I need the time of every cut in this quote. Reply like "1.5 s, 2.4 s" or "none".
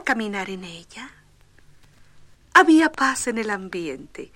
2.3 s